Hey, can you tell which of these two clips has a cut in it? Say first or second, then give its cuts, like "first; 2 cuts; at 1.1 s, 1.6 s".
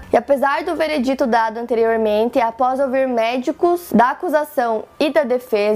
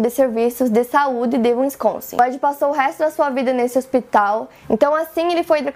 second; 1 cut; at 4.6 s